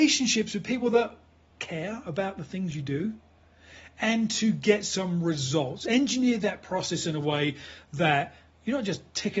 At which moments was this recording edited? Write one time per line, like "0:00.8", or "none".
none